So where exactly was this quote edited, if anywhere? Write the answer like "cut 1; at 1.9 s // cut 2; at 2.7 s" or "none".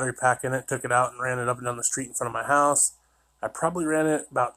none